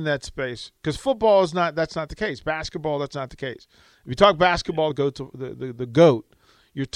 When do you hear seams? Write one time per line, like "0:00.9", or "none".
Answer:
none